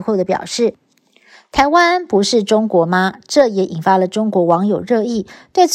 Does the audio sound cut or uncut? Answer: uncut